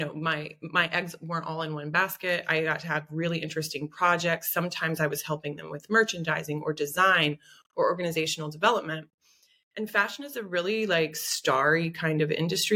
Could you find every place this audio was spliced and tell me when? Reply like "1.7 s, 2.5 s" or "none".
none